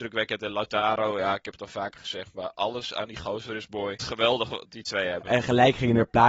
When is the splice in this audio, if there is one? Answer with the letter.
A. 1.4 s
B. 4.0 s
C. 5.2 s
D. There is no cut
B